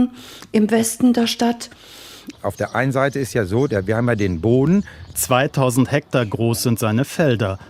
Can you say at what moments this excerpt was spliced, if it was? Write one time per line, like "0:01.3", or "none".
0:02.3
0:05.1